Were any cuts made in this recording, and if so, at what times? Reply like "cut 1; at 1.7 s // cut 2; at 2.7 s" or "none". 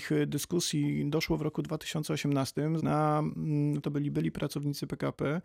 cut 1; at 2.8 s // cut 2; at 3.8 s